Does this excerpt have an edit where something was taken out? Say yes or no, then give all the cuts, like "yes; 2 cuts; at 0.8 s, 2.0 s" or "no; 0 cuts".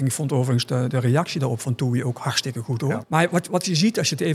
yes; 2 cuts; at 0.9 s, 3.0 s